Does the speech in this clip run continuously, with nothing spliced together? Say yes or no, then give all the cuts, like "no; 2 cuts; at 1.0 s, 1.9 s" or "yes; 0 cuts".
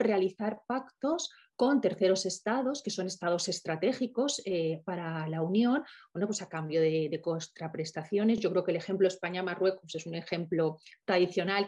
yes; 0 cuts